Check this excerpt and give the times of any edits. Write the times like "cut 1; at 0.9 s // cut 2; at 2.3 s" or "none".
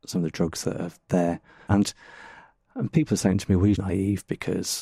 cut 1; at 1.7 s // cut 2; at 3.7 s